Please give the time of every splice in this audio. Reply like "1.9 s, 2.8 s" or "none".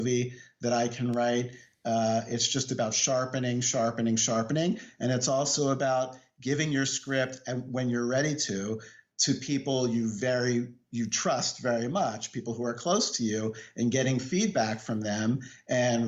none